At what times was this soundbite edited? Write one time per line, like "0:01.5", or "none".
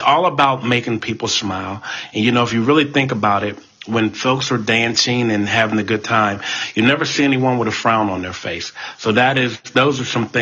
none